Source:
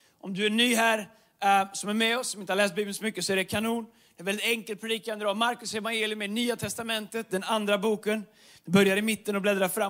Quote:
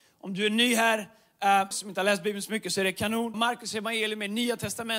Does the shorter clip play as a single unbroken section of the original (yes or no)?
no